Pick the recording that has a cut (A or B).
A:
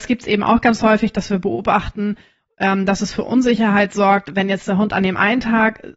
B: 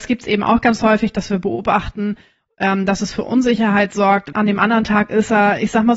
B